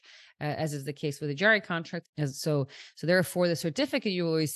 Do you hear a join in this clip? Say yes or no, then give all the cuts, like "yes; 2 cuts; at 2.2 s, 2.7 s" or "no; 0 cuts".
yes; 1 cut; at 2.0 s